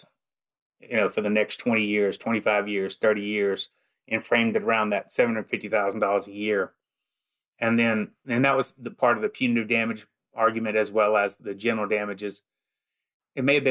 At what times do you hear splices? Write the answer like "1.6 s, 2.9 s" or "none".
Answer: none